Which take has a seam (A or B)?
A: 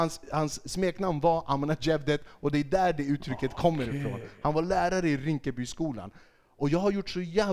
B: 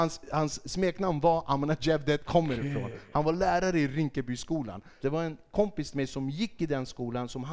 B